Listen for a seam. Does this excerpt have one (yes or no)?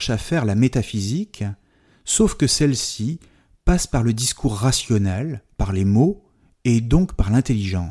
no